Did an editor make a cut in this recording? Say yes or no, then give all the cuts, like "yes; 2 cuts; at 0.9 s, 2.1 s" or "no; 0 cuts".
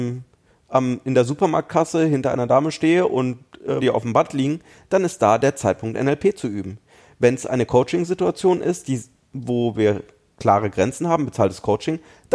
yes; 1 cut; at 3.8 s